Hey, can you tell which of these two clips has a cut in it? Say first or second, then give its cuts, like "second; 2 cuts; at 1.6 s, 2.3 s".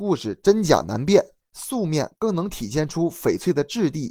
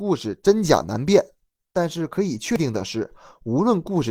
first; 1 cut; at 1.4 s